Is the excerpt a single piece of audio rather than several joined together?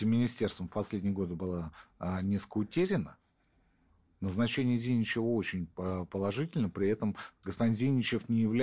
yes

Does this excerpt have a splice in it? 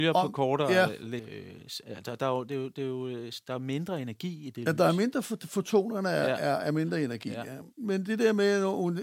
yes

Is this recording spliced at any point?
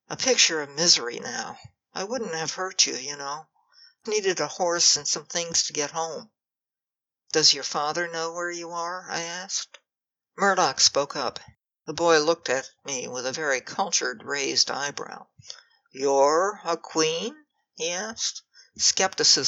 yes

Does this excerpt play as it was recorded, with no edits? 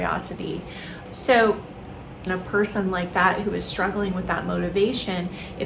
no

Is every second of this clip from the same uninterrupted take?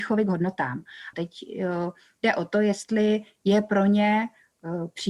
no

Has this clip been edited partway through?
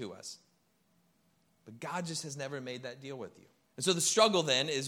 yes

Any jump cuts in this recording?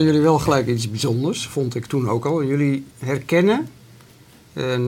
yes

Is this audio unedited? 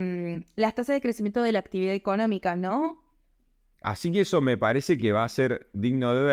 no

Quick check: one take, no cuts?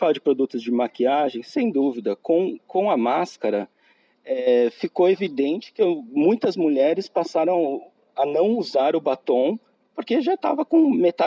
yes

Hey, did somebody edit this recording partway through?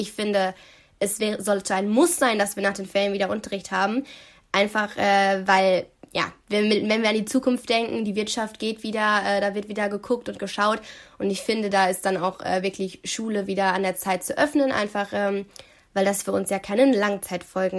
no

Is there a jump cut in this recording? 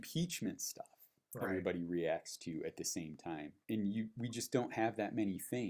yes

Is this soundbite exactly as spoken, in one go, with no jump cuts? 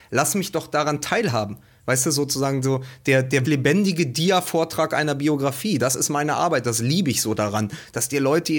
no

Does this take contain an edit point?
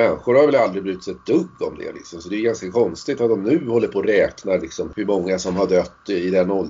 no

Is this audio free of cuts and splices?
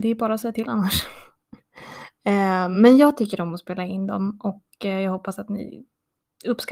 yes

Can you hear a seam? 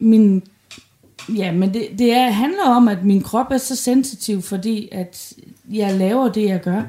no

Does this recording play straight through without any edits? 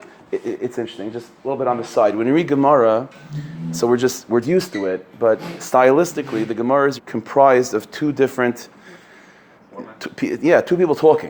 no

